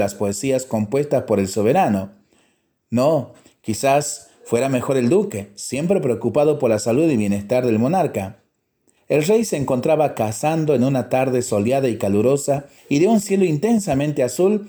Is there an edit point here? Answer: yes; 2 cuts; at 9.0 s, 12.8 s

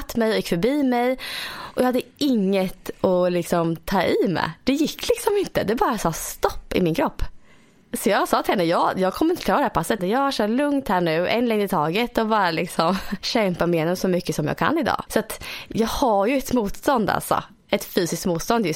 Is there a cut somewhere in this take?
yes; 2 cuts; at 10.0 s, 15.1 s

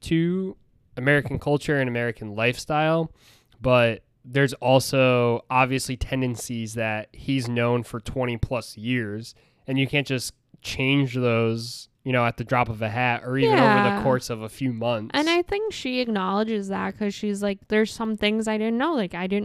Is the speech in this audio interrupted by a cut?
no; 0 cuts

